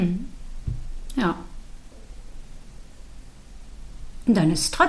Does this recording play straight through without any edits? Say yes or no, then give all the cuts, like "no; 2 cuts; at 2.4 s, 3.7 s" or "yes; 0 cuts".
yes; 0 cuts